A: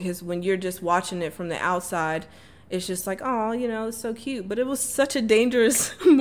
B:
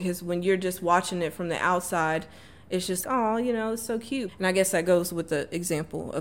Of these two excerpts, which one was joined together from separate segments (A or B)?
B